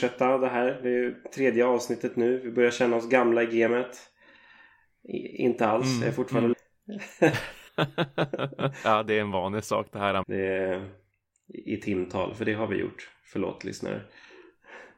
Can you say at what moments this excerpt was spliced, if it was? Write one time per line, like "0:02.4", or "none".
0:06.5
0:07.7
0:10.2